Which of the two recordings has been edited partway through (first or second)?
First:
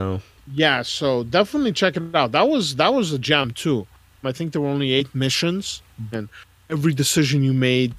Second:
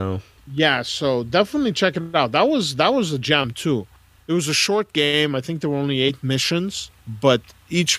first